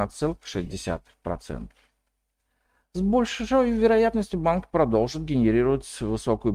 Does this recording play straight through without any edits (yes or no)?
yes